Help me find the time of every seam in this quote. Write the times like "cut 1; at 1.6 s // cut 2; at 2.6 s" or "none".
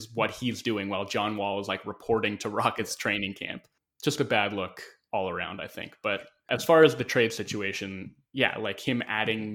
none

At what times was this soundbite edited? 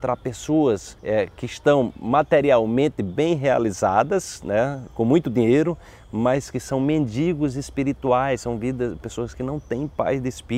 cut 1; at 1.0 s // cut 2; at 9.0 s

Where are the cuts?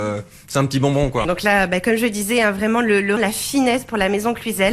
cut 1; at 1.2 s // cut 2; at 3.2 s

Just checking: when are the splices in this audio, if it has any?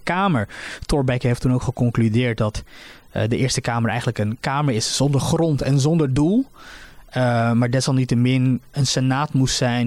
cut 1; at 8.7 s

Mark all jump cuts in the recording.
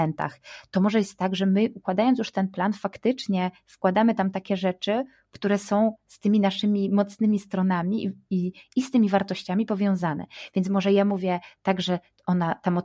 none

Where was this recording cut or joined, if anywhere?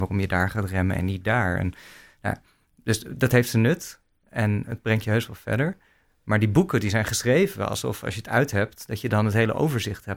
none

